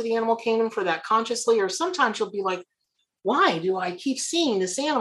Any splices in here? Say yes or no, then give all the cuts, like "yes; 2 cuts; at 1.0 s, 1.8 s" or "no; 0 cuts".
no; 0 cuts